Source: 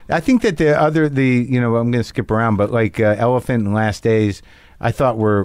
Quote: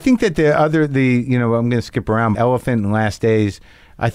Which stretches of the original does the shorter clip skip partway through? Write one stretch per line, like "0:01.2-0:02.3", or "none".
0:02.6-0:03.2